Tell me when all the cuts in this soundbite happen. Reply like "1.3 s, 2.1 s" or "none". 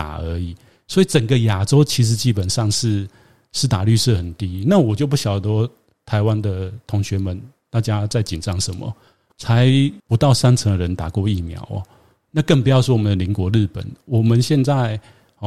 9.3 s, 12.2 s